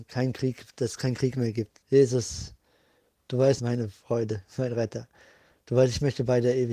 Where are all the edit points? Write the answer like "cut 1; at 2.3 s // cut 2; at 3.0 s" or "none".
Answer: cut 1; at 1.8 s // cut 2; at 3.6 s

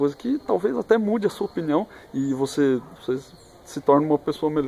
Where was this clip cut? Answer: cut 1; at 3.0 s

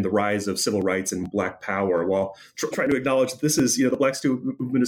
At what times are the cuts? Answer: cut 1; at 2.7 s

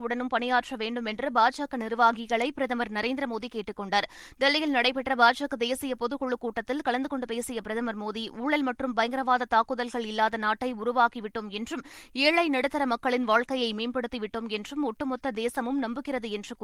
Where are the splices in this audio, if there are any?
none

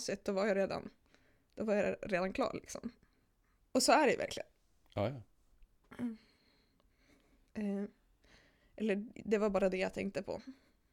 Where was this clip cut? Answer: cut 1; at 3.6 s // cut 2; at 7.4 s

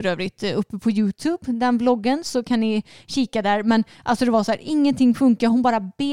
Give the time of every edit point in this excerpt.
none

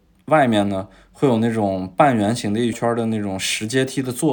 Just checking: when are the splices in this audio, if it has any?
cut 1; at 2.7 s

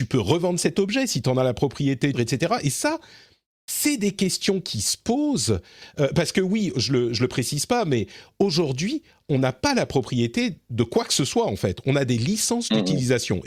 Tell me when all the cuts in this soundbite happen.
cut 1; at 2.1 s

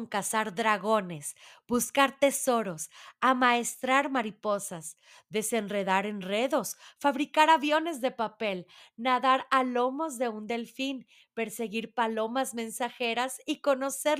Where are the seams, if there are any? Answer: none

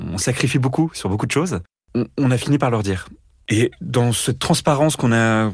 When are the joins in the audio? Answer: cut 1; at 3.5 s

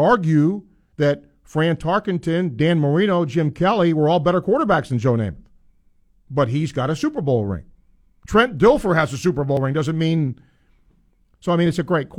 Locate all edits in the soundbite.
none

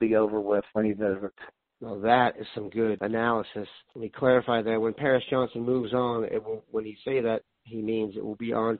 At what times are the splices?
none

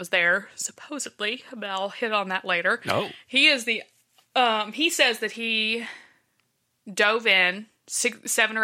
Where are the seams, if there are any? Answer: none

